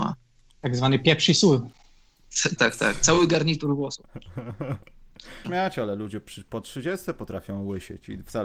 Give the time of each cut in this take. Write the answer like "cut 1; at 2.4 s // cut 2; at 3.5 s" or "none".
cut 1; at 2.6 s // cut 2; at 5.4 s